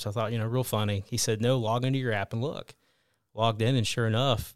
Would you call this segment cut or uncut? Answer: uncut